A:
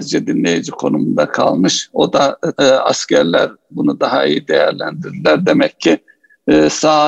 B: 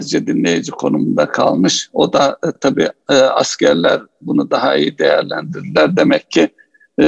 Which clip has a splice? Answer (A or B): A